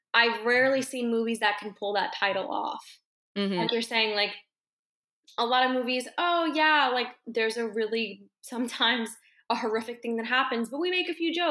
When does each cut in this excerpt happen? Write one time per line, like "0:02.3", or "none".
0:03.7